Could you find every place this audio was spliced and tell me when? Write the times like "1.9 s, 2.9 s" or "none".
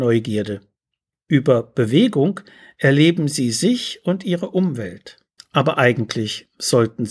5.4 s

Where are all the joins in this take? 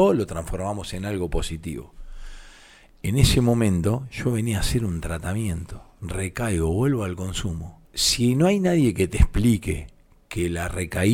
7.8 s

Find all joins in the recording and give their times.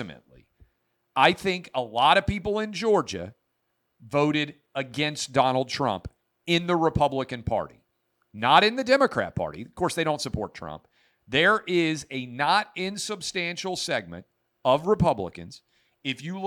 none

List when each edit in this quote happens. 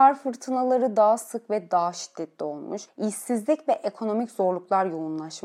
2.9 s

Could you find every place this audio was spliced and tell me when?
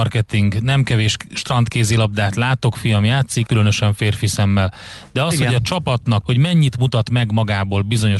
3.5 s, 6.2 s

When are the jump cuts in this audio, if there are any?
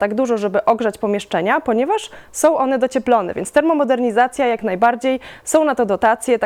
none

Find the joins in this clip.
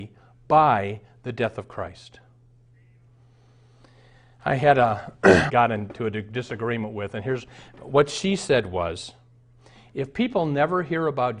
5.5 s

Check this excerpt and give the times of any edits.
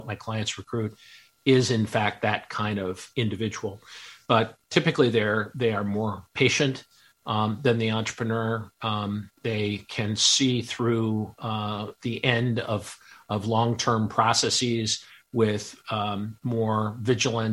none

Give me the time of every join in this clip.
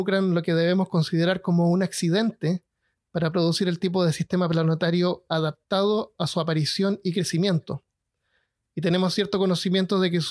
none

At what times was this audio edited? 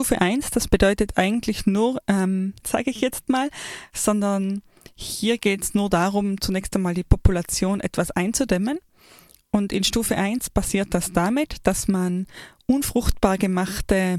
2.6 s

